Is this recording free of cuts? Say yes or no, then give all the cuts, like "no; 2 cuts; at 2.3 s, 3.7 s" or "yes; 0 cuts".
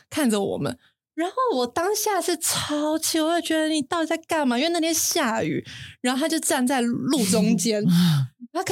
yes; 0 cuts